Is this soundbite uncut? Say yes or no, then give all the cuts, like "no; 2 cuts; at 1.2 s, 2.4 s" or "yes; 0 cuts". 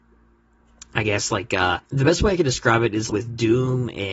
no; 2 cuts; at 1.8 s, 3.1 s